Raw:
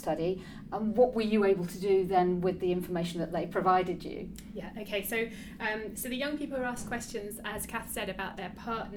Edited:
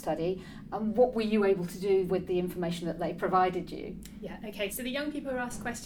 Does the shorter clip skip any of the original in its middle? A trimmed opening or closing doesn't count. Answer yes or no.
yes